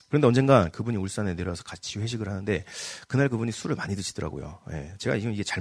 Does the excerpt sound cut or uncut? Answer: uncut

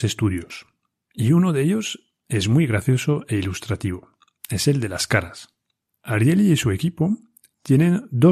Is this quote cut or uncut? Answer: cut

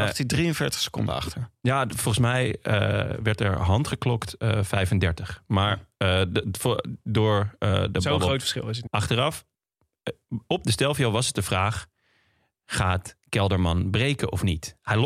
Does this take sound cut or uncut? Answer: cut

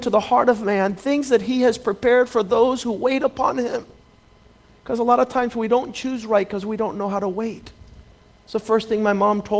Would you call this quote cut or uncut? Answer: uncut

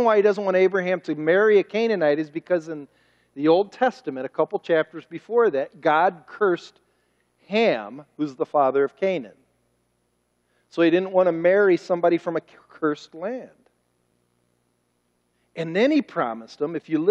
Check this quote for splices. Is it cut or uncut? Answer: uncut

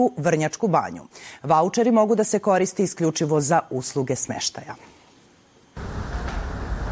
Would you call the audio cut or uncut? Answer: uncut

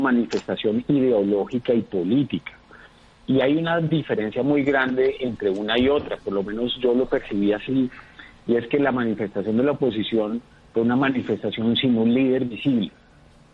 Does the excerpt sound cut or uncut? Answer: uncut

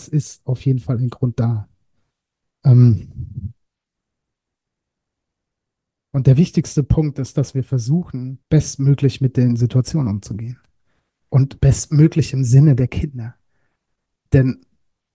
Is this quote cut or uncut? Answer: cut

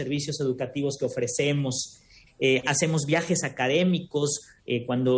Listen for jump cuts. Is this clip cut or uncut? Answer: cut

